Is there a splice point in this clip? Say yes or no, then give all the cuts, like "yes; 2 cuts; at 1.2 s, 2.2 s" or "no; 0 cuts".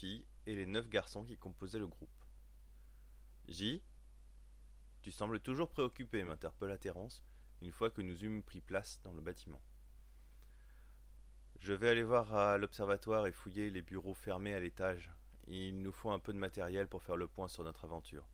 no; 0 cuts